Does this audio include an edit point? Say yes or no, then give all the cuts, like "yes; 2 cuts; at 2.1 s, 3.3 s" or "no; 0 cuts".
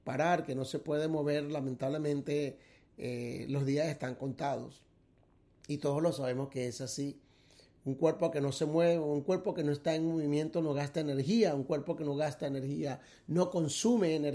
no; 0 cuts